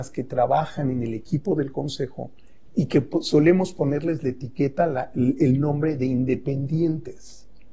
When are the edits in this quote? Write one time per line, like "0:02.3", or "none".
0:02.7